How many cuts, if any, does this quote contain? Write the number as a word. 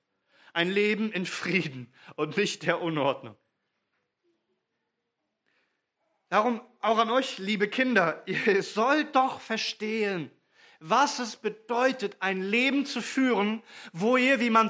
zero